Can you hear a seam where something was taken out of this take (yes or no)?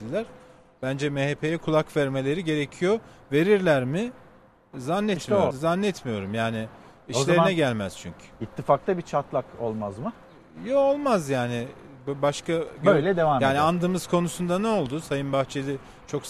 yes